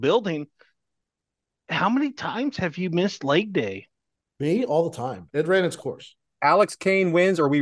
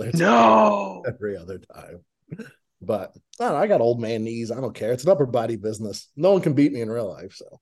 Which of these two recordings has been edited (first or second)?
first